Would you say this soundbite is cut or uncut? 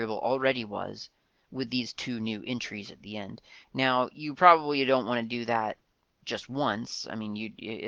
uncut